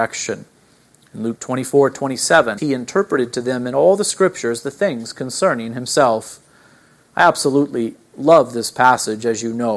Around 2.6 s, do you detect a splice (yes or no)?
yes